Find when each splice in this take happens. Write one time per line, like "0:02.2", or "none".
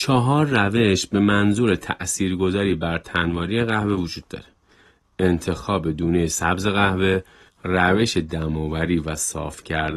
0:07.5